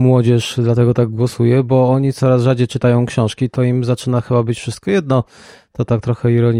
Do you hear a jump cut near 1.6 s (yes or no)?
no